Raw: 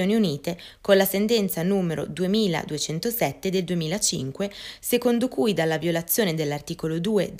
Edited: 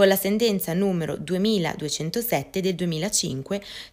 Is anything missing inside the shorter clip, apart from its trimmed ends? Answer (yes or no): no